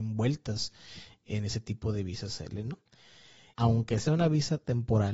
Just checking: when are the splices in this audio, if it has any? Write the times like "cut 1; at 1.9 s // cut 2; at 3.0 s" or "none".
cut 1; at 3.5 s

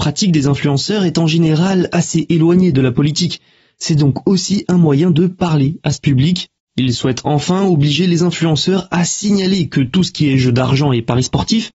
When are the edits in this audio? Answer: cut 1; at 6.6 s

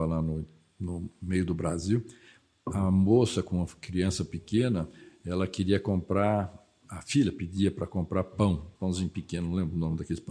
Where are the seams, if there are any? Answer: cut 1; at 8.8 s

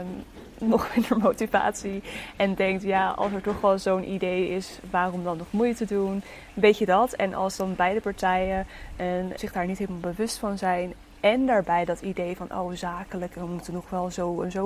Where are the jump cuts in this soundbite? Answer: cut 1; at 9.4 s

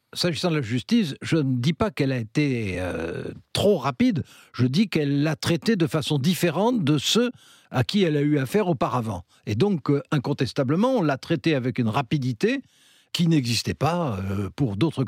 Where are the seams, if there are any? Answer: none

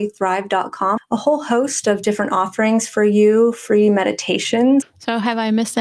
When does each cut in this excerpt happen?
cut 1; at 1.0 s // cut 2; at 4.8 s

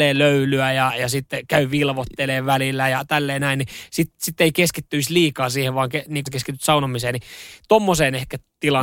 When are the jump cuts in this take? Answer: cut 1; at 6.3 s

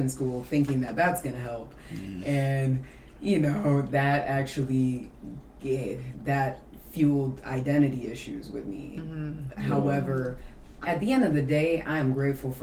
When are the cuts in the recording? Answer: cut 1; at 10.8 s

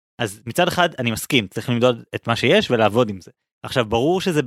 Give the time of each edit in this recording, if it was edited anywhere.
cut 1; at 3.6 s

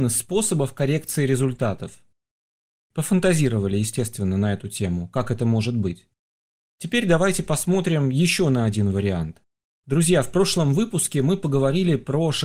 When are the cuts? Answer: cut 1; at 9.6 s

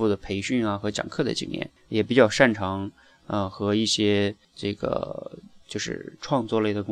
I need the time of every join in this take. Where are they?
cut 1; at 1.8 s // cut 2; at 4.4 s

